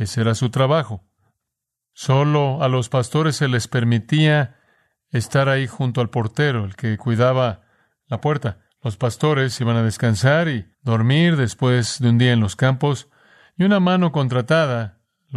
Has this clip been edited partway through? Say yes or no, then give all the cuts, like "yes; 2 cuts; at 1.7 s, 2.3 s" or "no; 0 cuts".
yes; 3 cuts; at 1.8 s, 8.7 s, 10.7 s